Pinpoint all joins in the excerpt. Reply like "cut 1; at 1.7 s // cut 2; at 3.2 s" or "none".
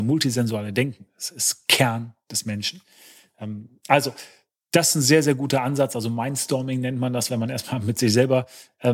none